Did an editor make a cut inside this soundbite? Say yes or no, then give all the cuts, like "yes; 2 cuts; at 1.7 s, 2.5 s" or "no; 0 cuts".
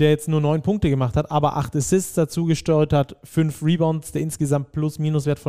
no; 0 cuts